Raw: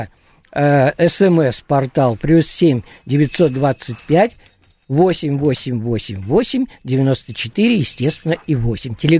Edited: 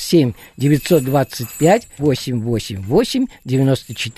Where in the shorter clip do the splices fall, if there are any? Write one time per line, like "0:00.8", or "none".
0:02.0